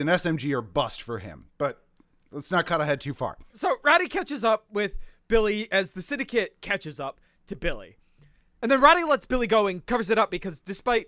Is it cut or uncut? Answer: cut